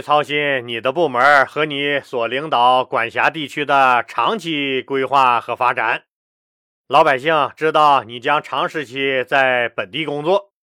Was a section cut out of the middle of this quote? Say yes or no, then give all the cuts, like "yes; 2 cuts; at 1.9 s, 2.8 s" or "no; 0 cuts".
no; 0 cuts